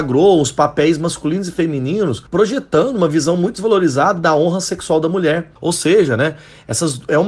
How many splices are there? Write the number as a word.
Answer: one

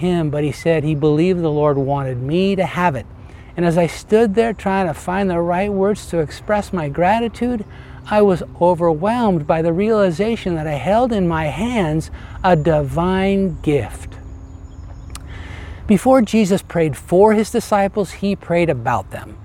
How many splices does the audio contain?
one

